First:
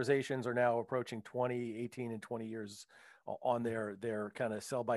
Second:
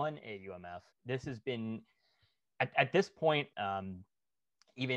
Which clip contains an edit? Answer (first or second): second